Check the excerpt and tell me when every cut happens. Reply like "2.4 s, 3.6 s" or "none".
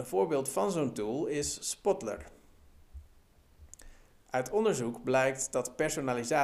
4.2 s